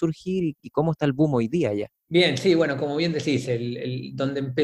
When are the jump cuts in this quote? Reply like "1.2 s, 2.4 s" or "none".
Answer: 2.0 s